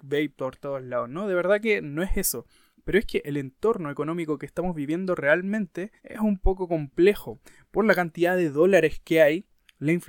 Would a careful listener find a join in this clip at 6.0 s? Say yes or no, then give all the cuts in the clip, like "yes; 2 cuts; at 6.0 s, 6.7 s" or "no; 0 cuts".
yes; 1 cut; at 6.0 s